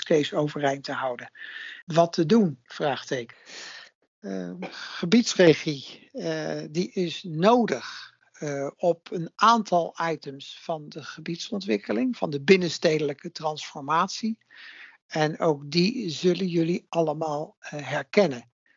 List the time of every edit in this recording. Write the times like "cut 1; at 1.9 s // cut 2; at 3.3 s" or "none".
cut 1; at 1.8 s